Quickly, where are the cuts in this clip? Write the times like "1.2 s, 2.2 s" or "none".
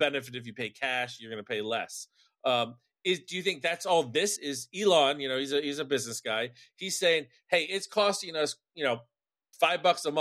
4.4 s